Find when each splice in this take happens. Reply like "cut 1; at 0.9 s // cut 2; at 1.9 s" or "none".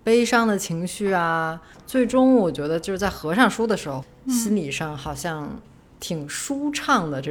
none